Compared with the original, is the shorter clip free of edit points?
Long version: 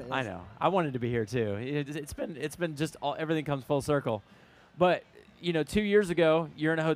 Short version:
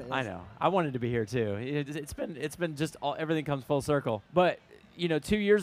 no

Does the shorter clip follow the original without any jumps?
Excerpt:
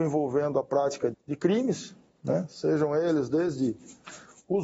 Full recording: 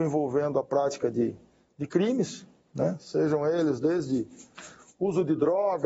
no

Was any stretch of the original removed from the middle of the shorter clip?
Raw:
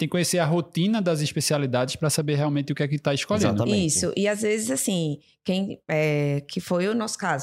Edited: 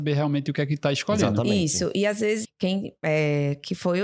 yes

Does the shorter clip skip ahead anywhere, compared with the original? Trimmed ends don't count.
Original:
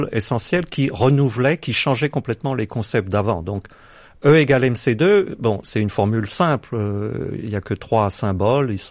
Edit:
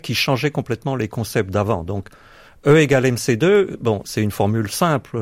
no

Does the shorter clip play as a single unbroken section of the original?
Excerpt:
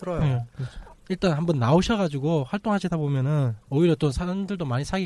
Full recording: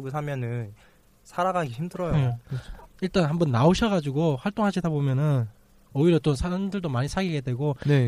no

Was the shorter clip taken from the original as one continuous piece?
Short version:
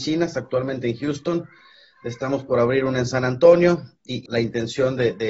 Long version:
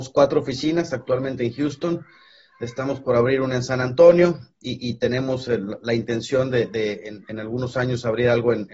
no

